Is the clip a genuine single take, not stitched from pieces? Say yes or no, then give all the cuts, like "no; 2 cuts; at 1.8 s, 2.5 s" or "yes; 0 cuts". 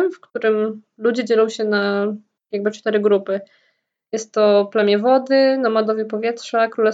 yes; 0 cuts